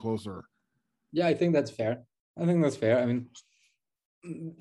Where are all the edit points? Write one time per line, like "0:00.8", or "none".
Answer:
none